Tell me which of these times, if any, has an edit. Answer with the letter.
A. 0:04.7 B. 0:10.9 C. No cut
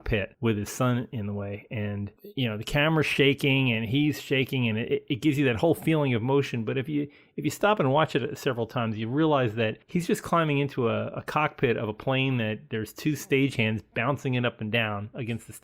C